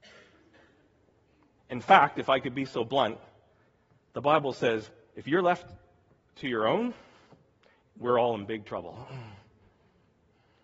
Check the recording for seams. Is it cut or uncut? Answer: cut